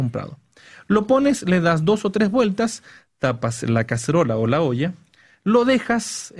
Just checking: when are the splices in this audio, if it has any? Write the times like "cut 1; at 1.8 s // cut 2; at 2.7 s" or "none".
none